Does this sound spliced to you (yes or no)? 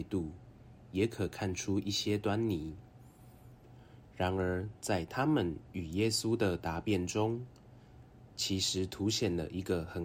no